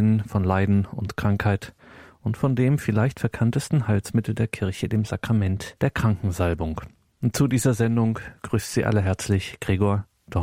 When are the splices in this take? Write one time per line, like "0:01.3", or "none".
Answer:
none